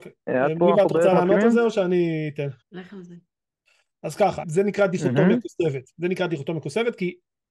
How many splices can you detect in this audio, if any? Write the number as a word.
two